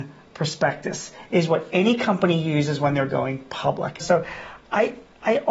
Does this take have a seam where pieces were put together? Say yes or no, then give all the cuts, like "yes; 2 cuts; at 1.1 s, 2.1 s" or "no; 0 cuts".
yes; 1 cut; at 4.0 s